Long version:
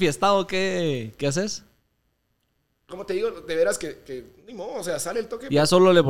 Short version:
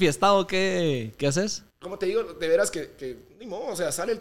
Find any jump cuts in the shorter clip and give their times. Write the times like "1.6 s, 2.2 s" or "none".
1.7 s